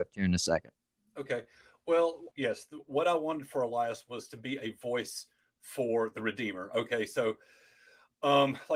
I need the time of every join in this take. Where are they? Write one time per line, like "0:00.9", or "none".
0:02.3